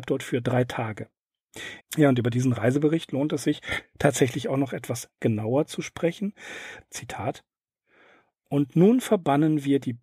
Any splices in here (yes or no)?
yes